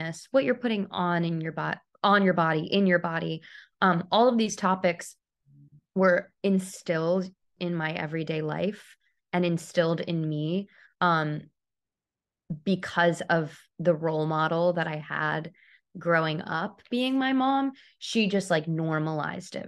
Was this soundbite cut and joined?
no; 0 cuts

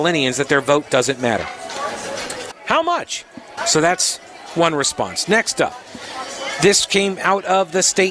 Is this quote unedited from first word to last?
no; 2 cuts; at 2.5 s, 3.6 s

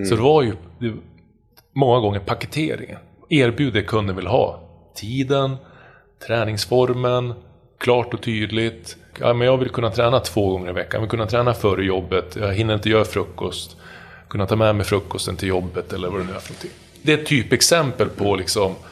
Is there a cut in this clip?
yes; 1 cut; at 9.1 s

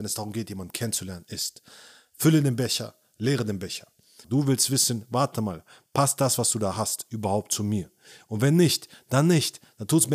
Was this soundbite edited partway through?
yes; 1 cut; at 4.2 s

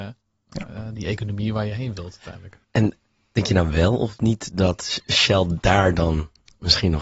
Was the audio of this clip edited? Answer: yes; 1 cut; at 2.6 s

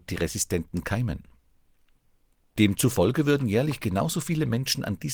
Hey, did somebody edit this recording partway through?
no; 0 cuts

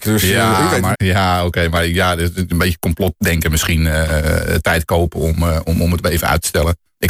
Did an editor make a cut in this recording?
yes; 1 cut; at 0.9 s

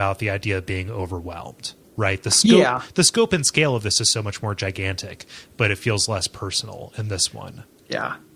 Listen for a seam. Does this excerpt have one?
no; 0 cuts

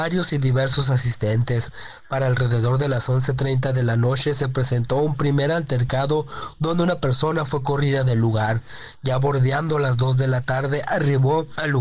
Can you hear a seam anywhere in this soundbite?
no; 0 cuts

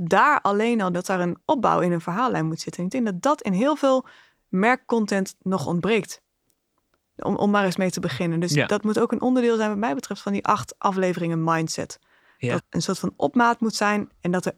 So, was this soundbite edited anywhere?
yes; 2 cuts; at 0.9 s, 12.6 s

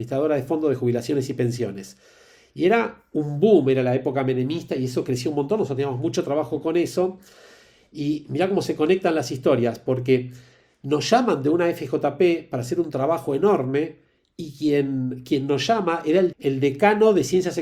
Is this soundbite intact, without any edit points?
yes; 0 cuts

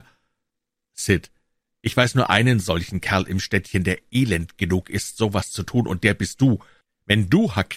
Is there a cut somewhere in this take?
no; 0 cuts

